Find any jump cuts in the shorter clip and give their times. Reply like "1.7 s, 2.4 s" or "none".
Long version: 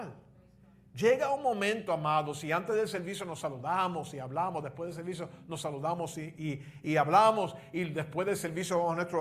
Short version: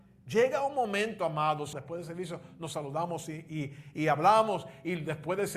1.7 s